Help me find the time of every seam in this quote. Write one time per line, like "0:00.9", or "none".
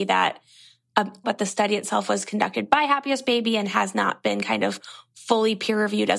0:01.2